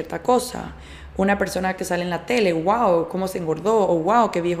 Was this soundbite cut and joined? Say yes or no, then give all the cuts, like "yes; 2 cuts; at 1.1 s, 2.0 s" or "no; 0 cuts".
no; 0 cuts